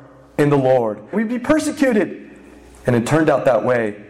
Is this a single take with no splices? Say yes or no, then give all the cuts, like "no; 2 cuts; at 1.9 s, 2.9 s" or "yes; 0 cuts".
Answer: no; 1 cut; at 1.1 s